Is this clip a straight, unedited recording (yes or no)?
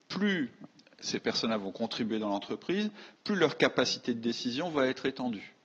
yes